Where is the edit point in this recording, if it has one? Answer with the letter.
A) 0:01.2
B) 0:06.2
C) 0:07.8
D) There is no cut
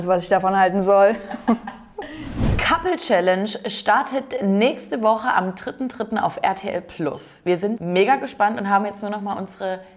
C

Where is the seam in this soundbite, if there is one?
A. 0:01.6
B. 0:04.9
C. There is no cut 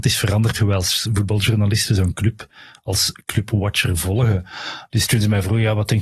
B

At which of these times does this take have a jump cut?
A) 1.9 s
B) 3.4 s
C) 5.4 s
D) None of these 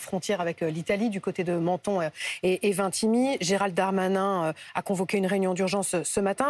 D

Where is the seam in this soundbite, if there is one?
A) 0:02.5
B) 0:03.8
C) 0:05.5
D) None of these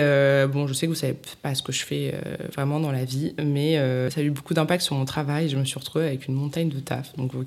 D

